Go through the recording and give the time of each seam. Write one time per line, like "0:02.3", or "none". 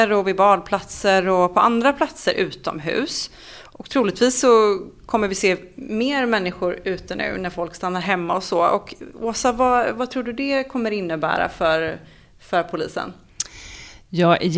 none